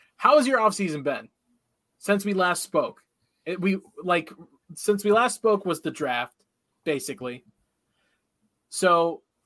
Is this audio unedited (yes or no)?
yes